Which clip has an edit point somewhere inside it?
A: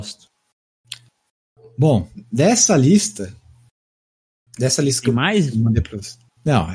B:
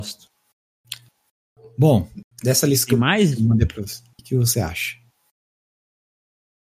B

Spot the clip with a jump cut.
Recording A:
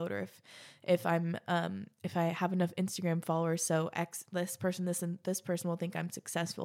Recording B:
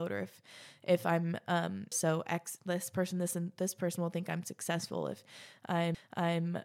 B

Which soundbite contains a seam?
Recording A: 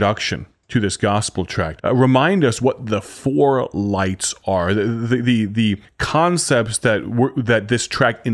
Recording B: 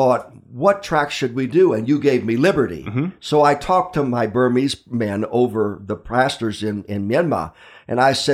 A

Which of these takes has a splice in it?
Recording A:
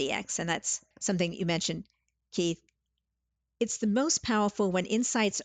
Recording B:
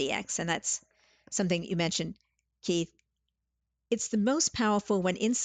A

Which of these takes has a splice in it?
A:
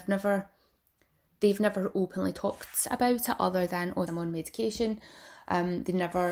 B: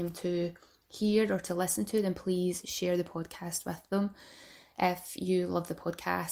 A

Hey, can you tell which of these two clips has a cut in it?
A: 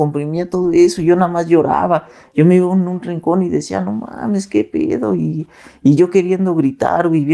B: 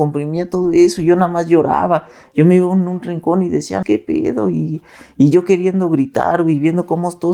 B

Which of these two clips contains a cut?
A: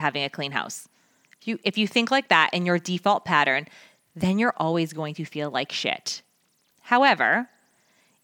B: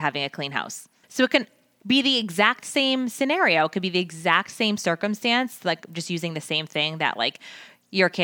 B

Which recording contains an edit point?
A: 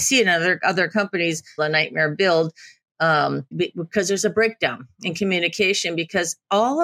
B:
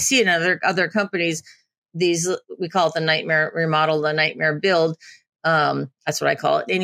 A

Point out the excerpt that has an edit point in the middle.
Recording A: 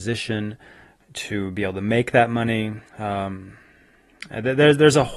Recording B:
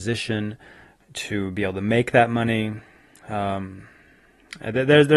A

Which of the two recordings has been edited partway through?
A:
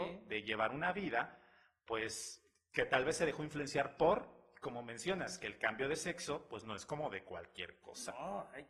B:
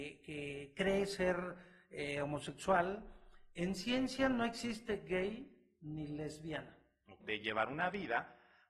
B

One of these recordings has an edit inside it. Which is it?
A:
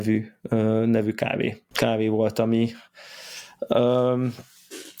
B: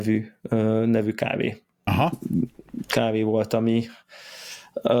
A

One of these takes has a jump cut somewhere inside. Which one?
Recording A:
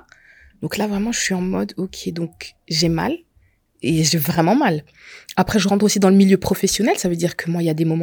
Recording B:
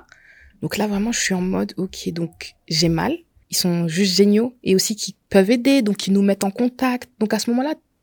B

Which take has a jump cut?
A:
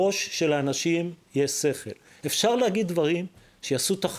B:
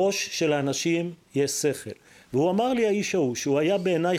A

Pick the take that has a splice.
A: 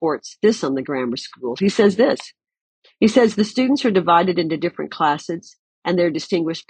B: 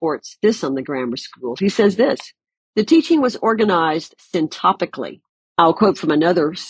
B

